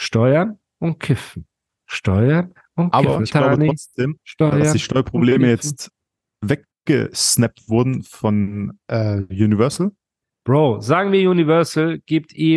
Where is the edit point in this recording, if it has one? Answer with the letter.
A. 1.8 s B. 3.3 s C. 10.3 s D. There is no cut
B